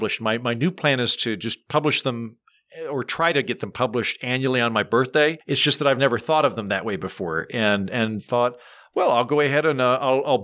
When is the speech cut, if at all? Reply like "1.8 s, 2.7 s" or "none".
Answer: 5.4 s